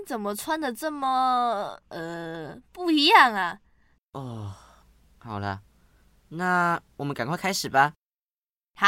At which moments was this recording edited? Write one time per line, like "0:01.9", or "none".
0:04.0